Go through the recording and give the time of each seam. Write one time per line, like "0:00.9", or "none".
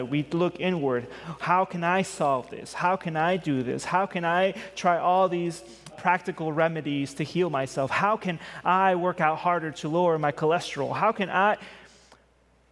0:05.9